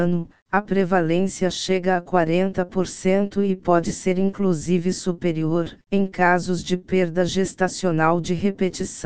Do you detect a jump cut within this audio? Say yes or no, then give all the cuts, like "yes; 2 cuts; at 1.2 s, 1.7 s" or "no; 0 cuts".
yes; 1 cut; at 5.8 s